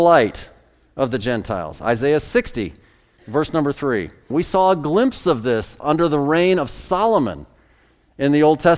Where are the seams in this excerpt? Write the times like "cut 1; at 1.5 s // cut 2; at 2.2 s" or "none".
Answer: cut 1; at 4.3 s